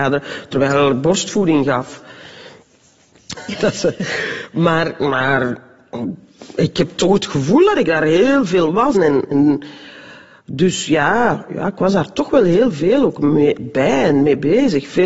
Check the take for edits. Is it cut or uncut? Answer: cut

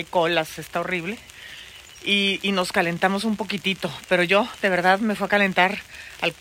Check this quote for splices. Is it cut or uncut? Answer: uncut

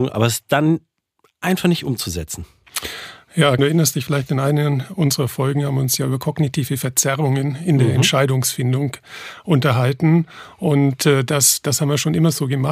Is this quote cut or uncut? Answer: cut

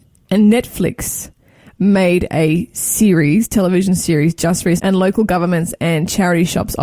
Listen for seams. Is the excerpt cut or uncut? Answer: cut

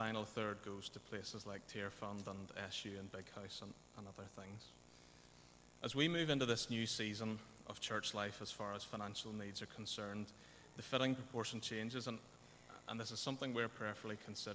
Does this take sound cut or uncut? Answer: uncut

